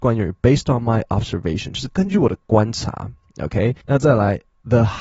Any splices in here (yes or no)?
yes